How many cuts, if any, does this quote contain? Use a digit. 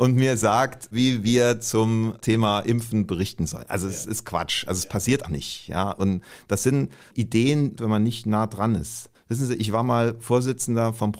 2